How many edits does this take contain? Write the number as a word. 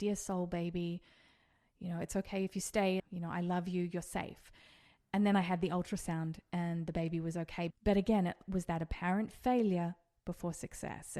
two